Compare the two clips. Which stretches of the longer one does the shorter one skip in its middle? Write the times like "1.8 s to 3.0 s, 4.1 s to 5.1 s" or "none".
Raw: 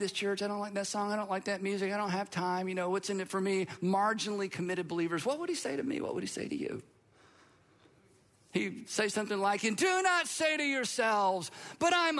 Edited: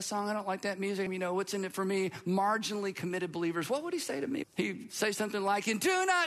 1.9 s to 2.6 s, 6.0 s to 8.4 s

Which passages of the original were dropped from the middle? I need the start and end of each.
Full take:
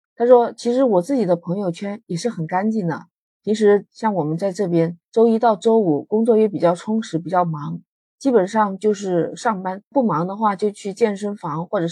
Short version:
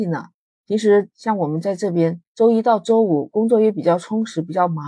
none

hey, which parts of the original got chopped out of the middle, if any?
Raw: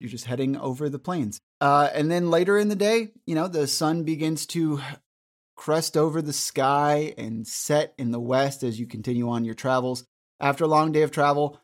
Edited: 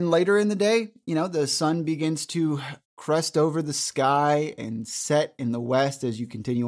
5.0 s to 5.4 s

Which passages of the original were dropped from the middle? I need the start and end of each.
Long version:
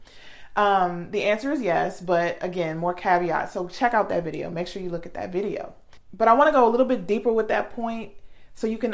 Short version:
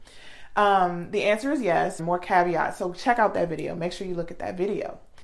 2.0 s to 2.7 s

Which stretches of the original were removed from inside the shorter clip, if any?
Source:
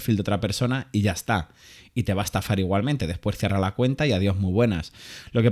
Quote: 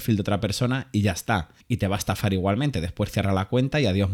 1.6 s to 1.9 s

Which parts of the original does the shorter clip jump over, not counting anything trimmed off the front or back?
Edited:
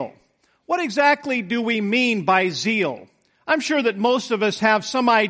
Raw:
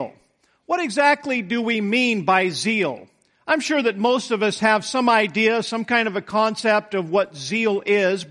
none

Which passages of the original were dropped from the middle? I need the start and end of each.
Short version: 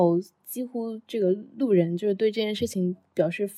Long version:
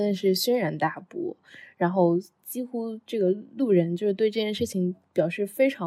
none

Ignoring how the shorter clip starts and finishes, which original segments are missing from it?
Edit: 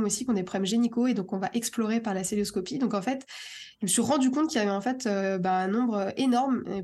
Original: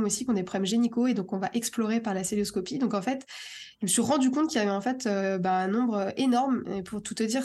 none

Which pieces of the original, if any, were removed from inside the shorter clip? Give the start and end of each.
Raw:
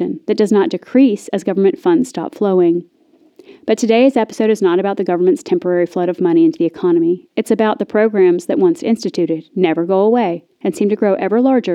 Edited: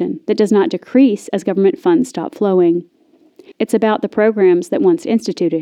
3.5 s to 7.3 s

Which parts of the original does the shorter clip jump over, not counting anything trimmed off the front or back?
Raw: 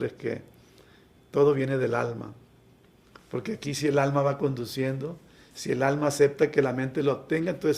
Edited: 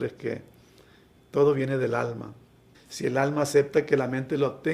2.7 s to 5.4 s

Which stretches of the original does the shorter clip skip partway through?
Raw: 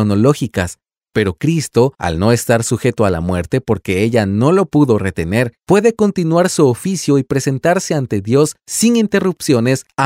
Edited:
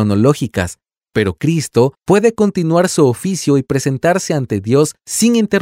2.0 s to 5.6 s

